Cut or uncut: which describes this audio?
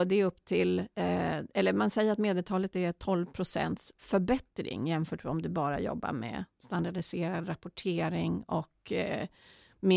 uncut